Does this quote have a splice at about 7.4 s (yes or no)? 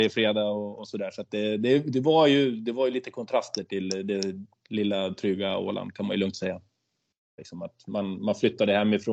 yes